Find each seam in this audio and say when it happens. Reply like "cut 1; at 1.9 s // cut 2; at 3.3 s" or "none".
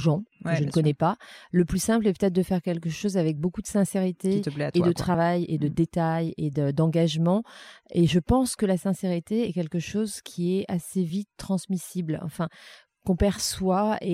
none